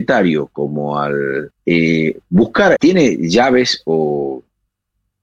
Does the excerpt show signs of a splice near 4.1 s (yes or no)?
no